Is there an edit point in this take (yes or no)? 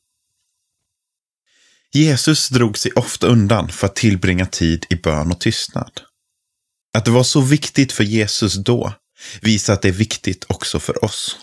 no